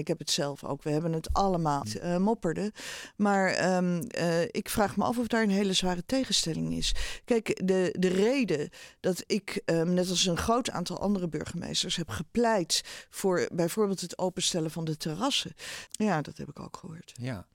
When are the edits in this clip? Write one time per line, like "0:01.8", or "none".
0:01.8
0:15.9